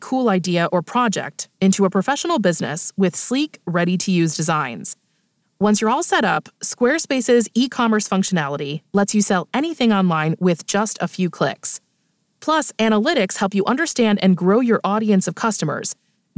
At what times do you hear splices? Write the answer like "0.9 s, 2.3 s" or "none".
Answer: 5.4 s